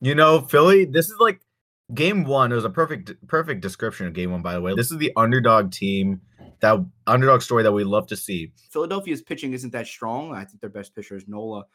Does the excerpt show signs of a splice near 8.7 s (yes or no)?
yes